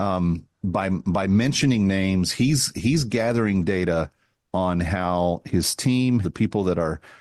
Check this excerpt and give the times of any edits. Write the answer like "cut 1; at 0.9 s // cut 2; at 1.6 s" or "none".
cut 1; at 6.2 s